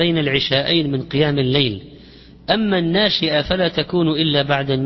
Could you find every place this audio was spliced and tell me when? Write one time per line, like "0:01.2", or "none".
none